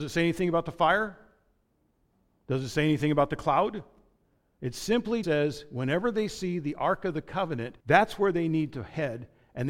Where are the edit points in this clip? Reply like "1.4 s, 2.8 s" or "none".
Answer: 5.2 s, 7.8 s